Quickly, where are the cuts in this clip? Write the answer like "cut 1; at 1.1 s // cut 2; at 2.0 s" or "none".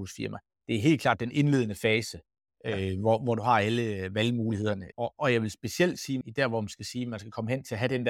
cut 1; at 4.9 s // cut 2; at 6.2 s